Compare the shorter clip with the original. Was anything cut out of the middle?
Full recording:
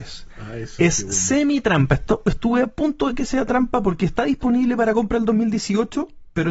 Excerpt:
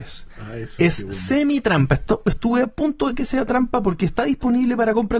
no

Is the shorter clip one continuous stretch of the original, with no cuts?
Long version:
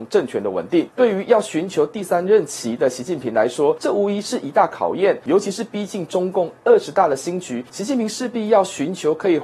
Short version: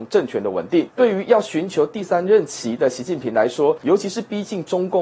no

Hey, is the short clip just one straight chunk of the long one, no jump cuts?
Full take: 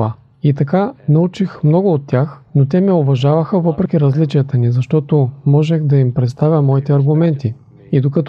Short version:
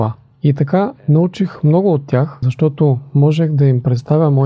no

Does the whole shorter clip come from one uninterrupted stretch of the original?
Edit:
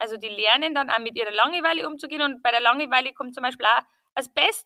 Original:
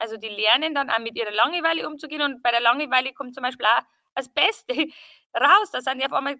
yes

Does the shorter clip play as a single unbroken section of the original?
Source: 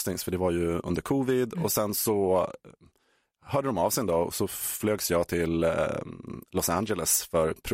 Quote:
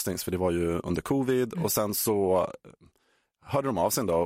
yes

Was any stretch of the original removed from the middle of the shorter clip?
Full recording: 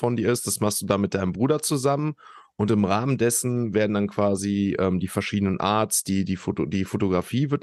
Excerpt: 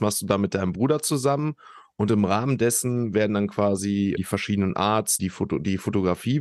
yes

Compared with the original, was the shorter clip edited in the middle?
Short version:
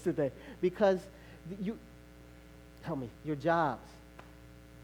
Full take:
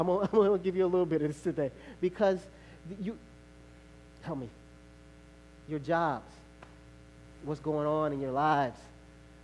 yes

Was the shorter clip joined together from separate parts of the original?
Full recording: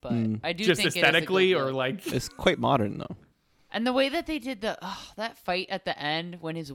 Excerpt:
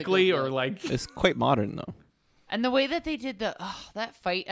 no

